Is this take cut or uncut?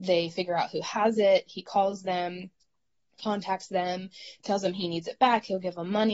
uncut